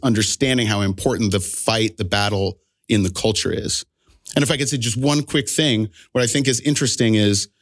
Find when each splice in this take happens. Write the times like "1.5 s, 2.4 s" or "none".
none